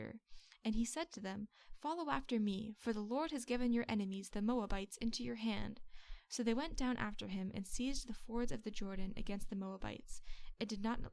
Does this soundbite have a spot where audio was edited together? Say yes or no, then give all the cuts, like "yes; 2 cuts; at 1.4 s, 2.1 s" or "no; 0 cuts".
no; 0 cuts